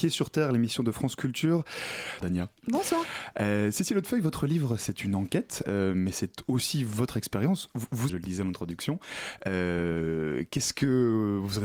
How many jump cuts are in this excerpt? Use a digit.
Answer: 2